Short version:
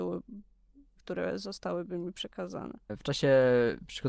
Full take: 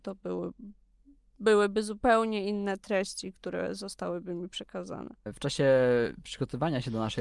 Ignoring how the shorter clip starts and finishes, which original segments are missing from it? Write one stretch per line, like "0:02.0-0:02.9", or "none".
0:01.3-0:03.3